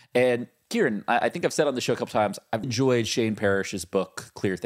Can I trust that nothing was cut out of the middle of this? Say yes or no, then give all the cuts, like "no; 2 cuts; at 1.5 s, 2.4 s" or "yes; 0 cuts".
no; 1 cut; at 2.6 s